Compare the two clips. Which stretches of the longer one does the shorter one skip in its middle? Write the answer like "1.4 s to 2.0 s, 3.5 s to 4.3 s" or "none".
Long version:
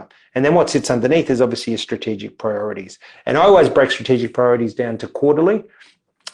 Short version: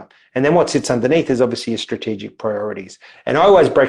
none